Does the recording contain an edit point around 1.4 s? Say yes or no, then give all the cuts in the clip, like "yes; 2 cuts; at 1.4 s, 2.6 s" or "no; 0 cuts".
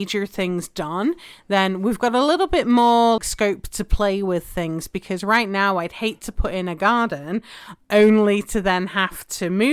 no; 1 cut; at 3.2 s